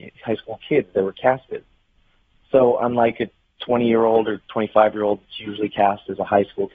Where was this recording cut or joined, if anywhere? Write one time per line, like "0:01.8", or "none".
none